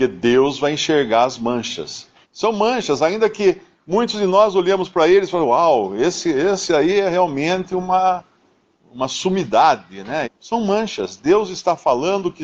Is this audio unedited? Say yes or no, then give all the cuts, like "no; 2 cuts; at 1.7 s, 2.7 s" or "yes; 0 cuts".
no; 2 cuts; at 2.2 s, 10.2 s